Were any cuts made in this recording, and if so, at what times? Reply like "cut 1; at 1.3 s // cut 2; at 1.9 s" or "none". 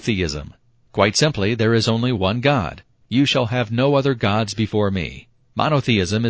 cut 1; at 3.0 s